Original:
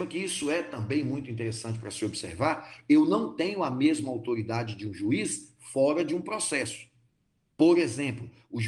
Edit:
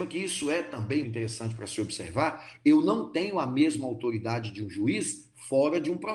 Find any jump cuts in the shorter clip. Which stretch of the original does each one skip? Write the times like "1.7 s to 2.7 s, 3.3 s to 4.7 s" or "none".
1.0 s to 1.3 s

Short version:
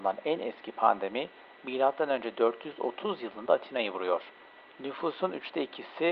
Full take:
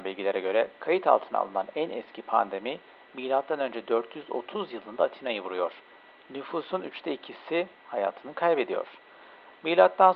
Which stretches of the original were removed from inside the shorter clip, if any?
none

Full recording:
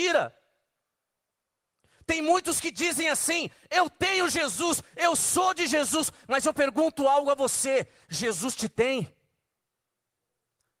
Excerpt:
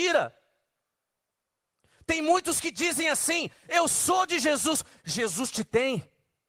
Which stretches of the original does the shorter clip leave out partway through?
3.6 s to 4.9 s, 6.2 s to 8.0 s

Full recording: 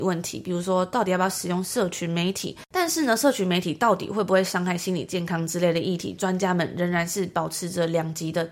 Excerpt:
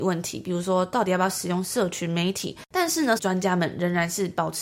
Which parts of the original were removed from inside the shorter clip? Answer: 3.2 s to 6.2 s

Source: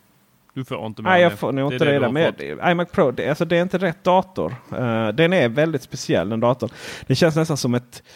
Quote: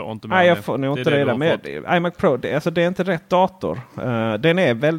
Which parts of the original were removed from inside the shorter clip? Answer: none

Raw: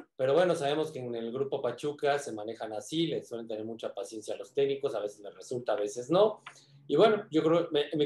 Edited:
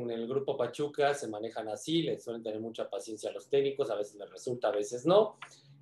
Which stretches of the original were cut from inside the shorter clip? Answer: none

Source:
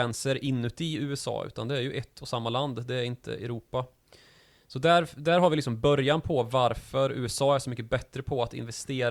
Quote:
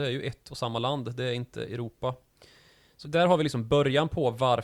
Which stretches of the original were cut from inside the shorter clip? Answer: 4.7 s to 5.1 s

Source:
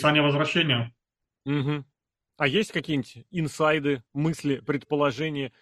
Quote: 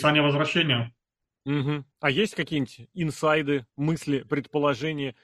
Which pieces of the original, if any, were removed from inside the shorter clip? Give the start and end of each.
1.9 s to 2.3 s

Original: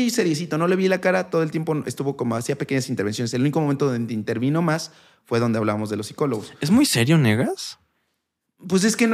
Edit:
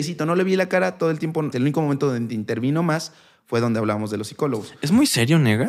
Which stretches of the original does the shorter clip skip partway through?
1.8 s to 3.3 s

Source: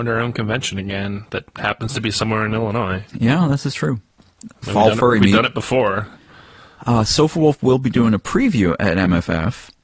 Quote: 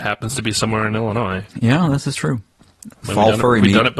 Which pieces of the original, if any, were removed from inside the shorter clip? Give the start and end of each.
none

